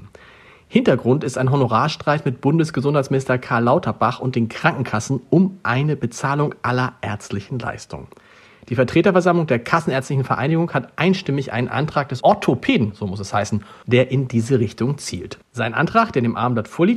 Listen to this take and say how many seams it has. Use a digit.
3